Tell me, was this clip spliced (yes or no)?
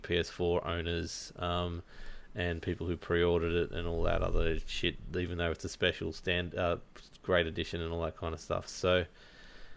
no